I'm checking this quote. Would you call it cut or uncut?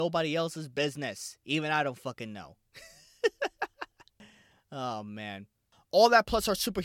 cut